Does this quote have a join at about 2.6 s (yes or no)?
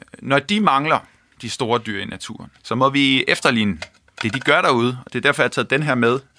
yes